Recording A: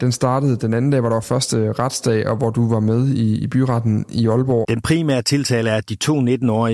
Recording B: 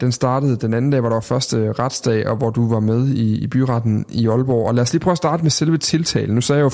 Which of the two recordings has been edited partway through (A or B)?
A